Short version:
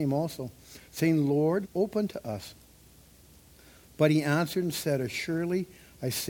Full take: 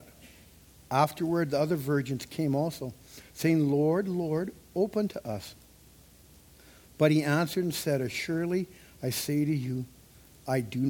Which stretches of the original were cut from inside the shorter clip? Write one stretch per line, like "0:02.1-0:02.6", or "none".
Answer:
0:04.0-0:04.6